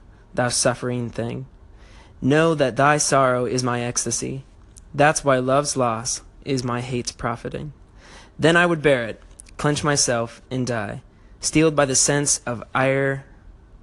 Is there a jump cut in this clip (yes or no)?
no